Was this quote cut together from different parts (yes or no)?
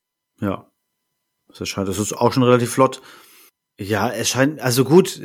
no